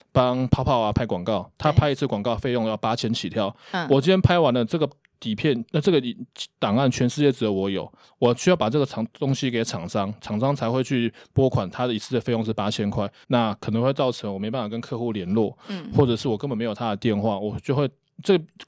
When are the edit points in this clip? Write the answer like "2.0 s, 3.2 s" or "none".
13.2 s